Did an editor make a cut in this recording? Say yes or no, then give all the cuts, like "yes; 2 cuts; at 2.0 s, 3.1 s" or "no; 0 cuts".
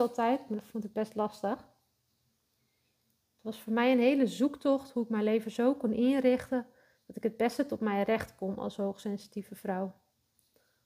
no; 0 cuts